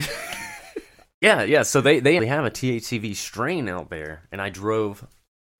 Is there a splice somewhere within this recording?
yes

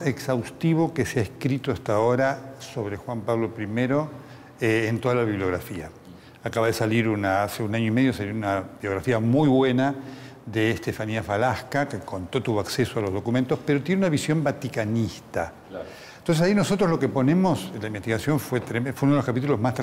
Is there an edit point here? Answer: no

